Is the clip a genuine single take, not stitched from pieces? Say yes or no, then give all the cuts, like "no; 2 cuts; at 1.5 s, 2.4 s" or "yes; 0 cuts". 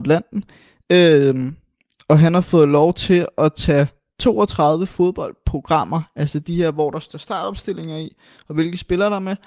yes; 0 cuts